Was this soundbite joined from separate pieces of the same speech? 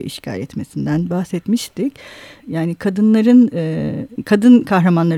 yes; 2 cuts; at 2.4 s, 4.2 s

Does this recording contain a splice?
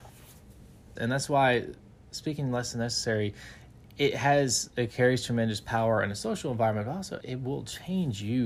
yes; 2 cuts; at 1.0 s, 7.2 s

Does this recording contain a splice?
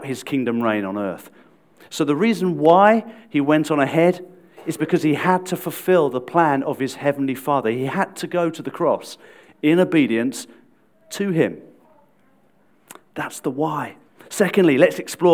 no; 0 cuts

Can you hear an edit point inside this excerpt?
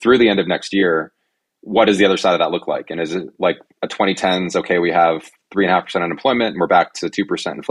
no; 0 cuts

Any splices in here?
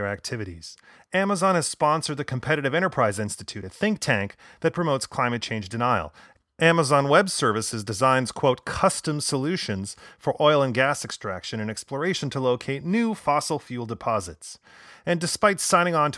no; 0 cuts

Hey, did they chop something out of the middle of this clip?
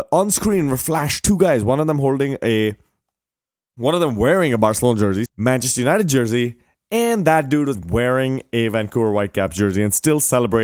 yes; 2 cuts; at 5.3 s, 7.7 s

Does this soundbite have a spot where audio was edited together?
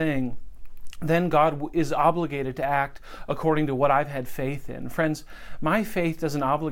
no; 0 cuts

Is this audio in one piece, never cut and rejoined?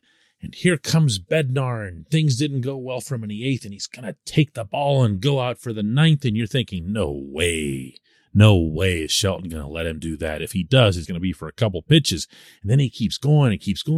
no; 1 cut; at 11.0 s

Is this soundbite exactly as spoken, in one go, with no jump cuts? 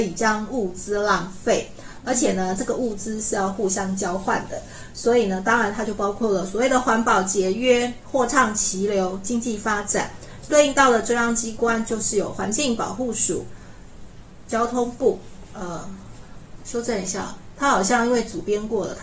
no; 2 cuts; at 14.5 s, 16.6 s

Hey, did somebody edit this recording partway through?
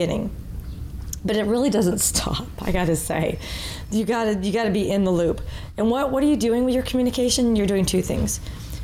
no; 0 cuts

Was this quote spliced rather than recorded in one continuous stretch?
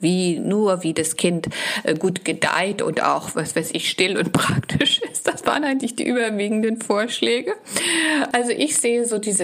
yes; 1 cut; at 8.3 s

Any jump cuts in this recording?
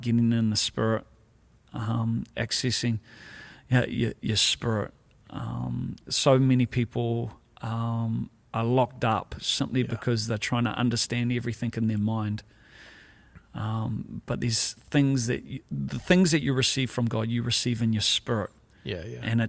no; 0 cuts

